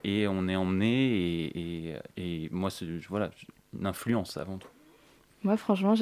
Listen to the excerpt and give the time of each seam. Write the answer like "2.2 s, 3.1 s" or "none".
2.1 s

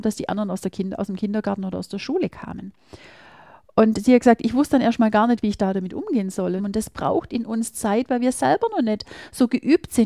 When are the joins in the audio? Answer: 6.6 s

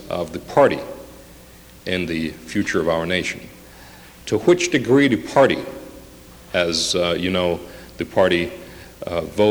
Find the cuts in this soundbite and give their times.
none

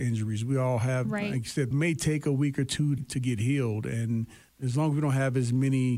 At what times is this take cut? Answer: 1.7 s, 3.0 s, 4.5 s

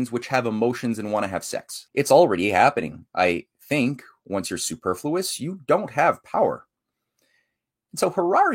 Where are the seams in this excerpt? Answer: 1.9 s

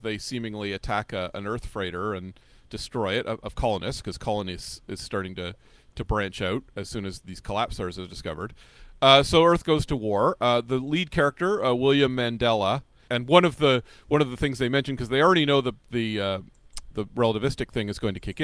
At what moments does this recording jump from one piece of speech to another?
13.1 s, 16.9 s

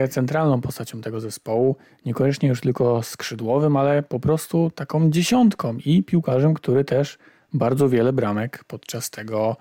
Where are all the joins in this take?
none

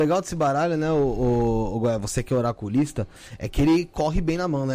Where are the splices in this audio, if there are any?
none

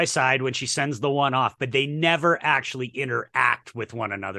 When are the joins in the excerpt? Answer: none

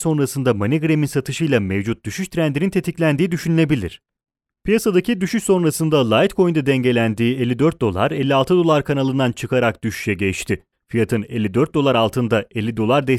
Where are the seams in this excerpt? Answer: none

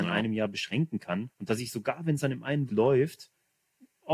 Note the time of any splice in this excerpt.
1.3 s, 2.7 s

